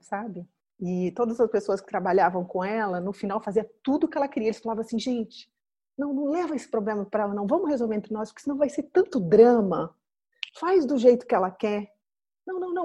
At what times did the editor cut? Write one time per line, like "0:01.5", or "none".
none

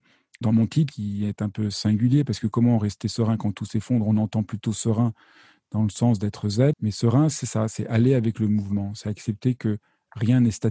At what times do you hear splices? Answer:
0:06.7

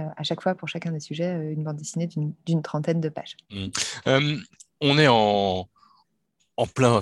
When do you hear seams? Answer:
0:03.4

